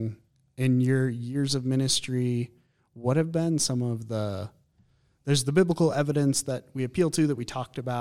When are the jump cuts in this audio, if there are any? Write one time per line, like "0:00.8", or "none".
none